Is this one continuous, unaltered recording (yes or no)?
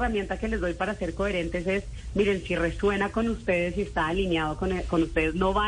yes